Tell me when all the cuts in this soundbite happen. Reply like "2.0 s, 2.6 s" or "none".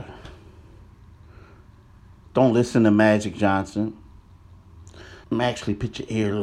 2.3 s, 5.2 s